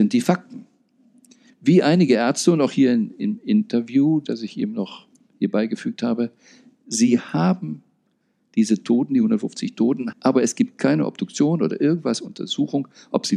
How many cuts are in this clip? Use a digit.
2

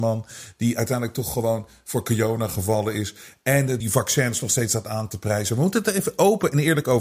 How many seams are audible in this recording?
1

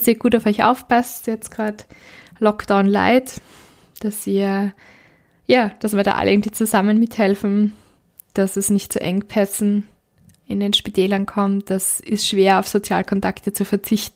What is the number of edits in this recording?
0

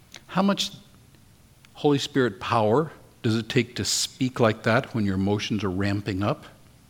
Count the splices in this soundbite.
0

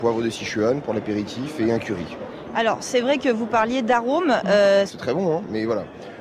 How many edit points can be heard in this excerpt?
1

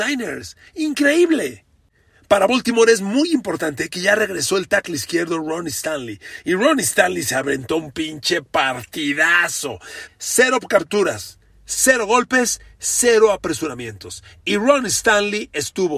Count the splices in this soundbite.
1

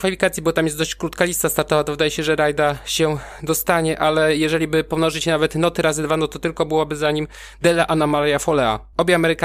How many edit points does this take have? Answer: 0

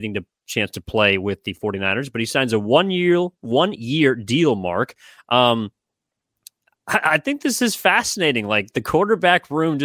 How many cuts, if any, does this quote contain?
0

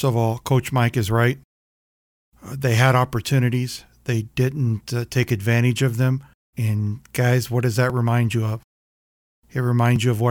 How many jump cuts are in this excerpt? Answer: 1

